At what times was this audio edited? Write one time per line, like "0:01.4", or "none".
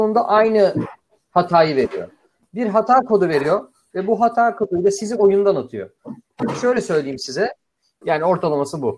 0:08.0